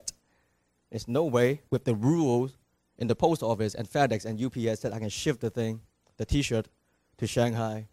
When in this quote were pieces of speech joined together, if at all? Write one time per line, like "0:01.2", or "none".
0:01.7